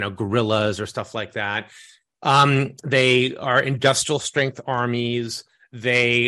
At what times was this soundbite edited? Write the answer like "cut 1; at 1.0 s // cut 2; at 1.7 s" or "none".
none